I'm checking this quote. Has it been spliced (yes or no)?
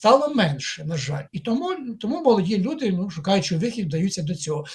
yes